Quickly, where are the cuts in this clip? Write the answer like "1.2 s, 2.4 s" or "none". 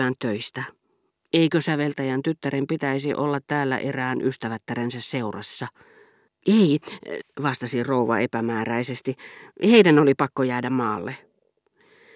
7.2 s